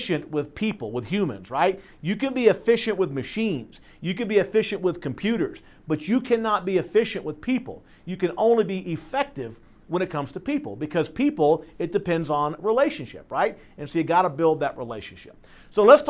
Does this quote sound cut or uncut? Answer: uncut